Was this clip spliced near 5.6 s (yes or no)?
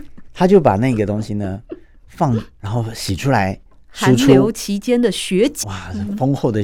yes